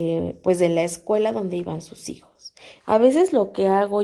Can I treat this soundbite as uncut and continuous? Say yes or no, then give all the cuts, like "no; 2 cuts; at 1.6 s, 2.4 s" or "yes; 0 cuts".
no; 1 cut; at 2.8 s